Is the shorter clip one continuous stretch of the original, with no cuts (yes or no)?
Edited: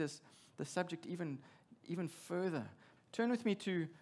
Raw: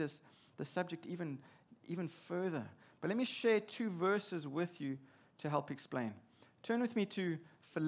no